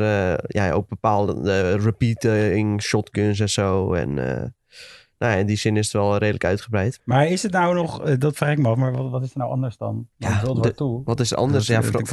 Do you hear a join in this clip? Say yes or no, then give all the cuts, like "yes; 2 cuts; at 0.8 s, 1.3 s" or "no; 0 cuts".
yes; 2 cuts; at 7.0 s, 10.1 s